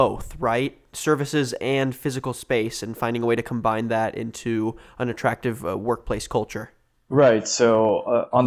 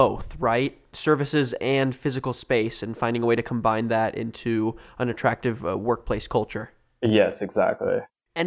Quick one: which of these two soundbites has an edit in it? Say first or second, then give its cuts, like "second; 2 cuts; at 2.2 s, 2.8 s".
first; 1 cut; at 6.9 s